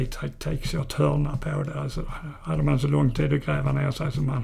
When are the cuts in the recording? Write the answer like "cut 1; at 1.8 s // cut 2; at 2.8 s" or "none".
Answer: none